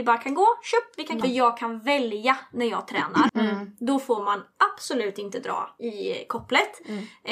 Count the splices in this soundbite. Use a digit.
3